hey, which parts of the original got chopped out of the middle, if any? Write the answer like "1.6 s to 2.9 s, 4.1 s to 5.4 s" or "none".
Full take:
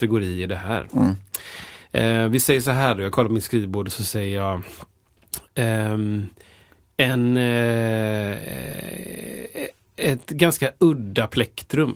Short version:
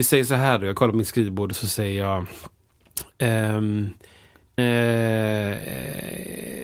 6.9 s to 7.4 s